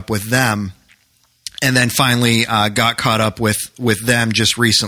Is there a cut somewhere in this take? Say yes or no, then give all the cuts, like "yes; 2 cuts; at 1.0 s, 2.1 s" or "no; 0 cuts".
no; 0 cuts